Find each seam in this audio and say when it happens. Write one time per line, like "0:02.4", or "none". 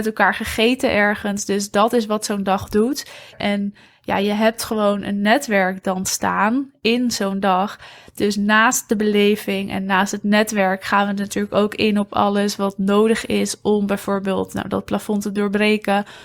0:03.3